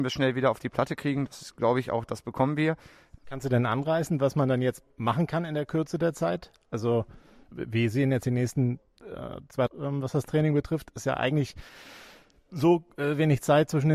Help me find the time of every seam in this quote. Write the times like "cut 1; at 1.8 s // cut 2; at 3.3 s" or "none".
cut 1; at 3.2 s // cut 2; at 9.7 s